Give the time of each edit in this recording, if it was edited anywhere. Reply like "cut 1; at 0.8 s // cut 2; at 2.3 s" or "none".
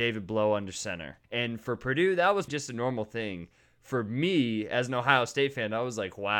cut 1; at 1.2 s // cut 2; at 2.5 s